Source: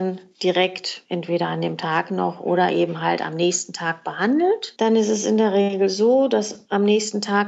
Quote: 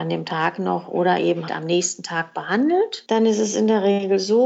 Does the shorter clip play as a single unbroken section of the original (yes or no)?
no